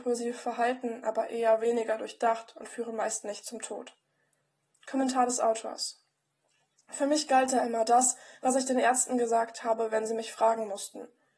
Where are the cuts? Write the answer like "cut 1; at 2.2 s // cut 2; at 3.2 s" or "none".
none

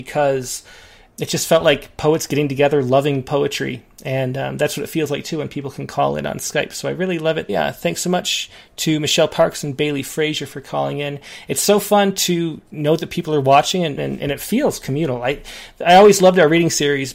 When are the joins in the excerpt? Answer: cut 1; at 1.1 s // cut 2; at 7.5 s // cut 3; at 14.0 s

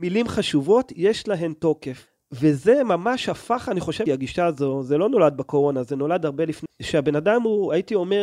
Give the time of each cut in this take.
cut 1; at 4.1 s // cut 2; at 6.7 s

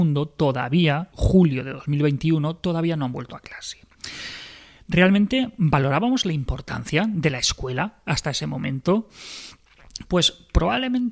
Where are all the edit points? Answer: cut 1; at 1.1 s

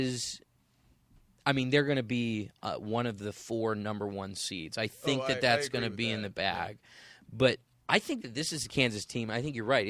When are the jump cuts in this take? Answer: none

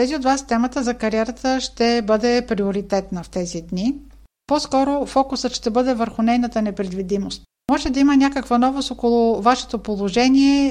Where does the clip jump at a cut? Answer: none

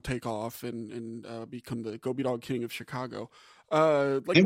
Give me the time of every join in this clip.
none

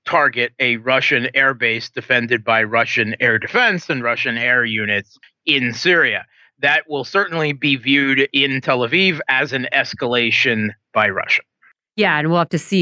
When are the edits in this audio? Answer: none

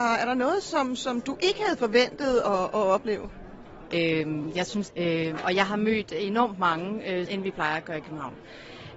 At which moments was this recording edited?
cut 1; at 3.9 s // cut 2; at 4.9 s // cut 3; at 7.3 s

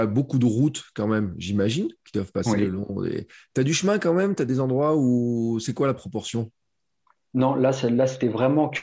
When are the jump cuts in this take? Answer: none

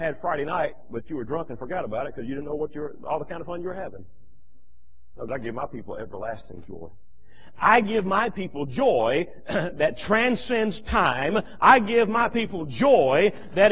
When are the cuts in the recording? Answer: cut 1; at 5.3 s

